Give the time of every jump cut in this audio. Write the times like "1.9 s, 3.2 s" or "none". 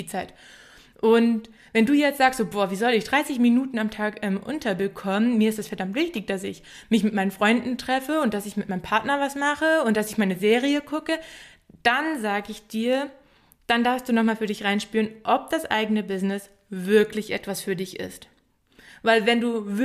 none